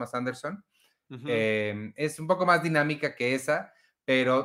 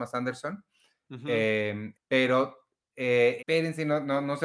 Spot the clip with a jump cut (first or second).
second